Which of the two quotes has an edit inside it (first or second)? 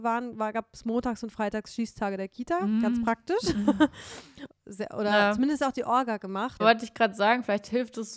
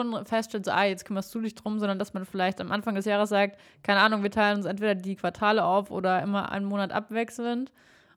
first